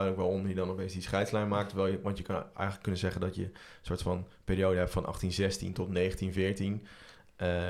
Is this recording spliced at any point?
no; 0 cuts

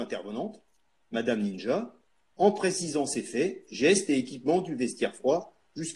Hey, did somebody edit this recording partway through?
no; 0 cuts

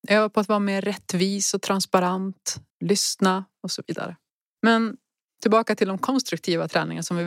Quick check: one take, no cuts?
no; 1 cut; at 2.7 s

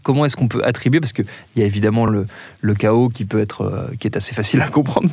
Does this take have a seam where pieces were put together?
no; 0 cuts

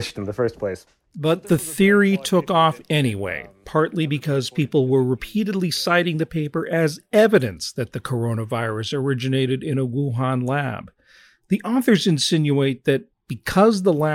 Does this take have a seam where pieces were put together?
no; 0 cuts

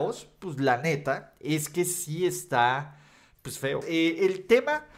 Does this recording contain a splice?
yes; 1 cut; at 3.8 s

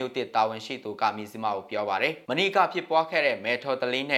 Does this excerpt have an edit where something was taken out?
yes; 1 cut; at 2.2 s

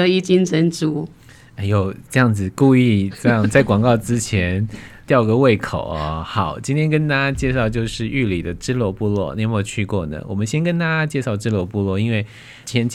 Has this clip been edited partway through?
no; 0 cuts

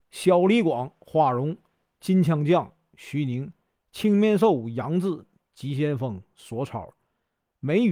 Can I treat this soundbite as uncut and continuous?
yes; 0 cuts

